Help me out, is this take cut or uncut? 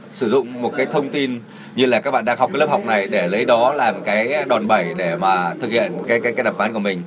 cut